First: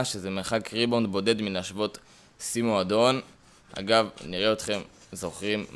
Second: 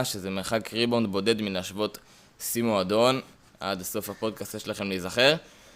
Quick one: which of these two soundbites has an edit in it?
second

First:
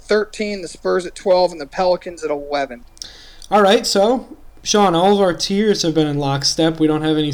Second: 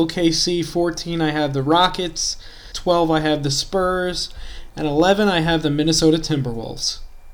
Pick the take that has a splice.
second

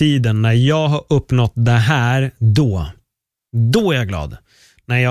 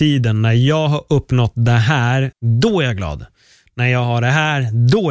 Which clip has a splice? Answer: second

